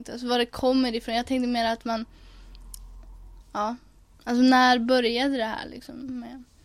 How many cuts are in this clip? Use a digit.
1